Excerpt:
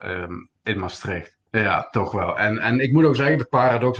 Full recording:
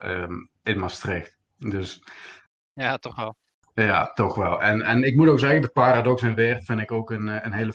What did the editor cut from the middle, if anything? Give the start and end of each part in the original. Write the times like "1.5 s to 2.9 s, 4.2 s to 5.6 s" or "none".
1.5 s to 3.7 s